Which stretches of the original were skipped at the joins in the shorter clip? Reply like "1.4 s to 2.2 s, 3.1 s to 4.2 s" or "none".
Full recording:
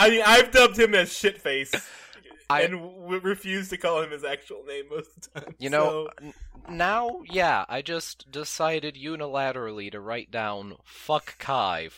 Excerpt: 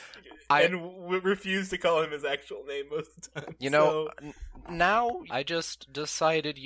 7.3 s to 7.7 s